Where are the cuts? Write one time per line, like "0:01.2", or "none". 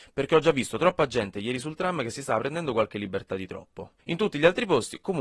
0:04.0